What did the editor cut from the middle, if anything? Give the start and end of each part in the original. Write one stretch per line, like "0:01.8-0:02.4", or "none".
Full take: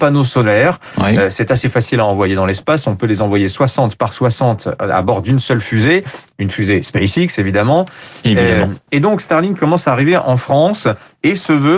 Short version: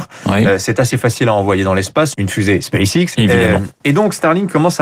0:02.8-0:06.3
0:07.4-0:08.2